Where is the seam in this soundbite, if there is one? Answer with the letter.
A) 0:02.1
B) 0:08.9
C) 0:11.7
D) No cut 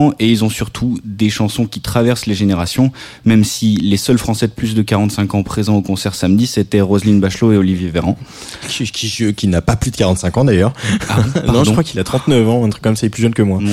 D